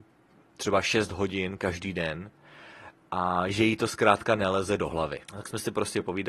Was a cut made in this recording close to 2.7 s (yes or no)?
no